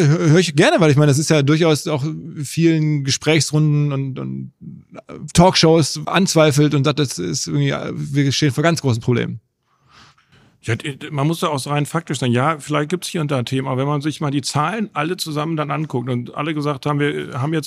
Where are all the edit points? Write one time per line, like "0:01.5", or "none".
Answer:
0:06.0